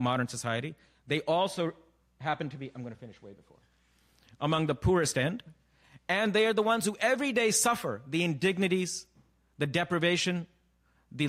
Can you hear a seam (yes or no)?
no